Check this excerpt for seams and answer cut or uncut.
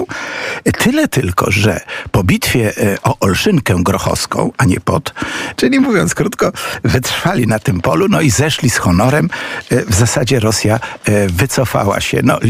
cut